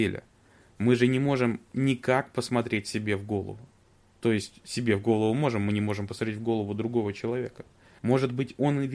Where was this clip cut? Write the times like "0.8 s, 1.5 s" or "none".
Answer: 8.0 s